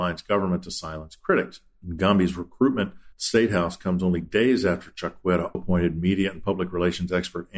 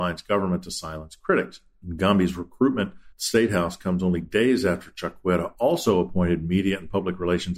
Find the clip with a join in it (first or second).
first